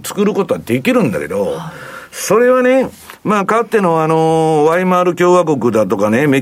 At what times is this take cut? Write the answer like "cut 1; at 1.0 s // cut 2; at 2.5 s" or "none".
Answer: none